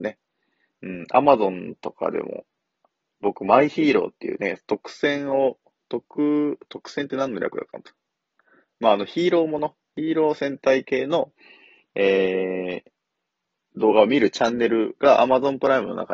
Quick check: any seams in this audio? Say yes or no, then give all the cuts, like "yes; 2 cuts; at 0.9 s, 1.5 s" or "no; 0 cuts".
no; 0 cuts